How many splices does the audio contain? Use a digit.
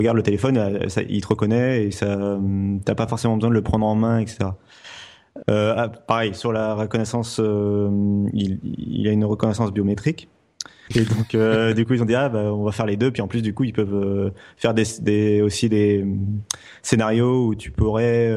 2